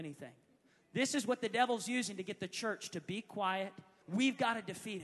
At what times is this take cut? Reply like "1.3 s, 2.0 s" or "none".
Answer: 4.0 s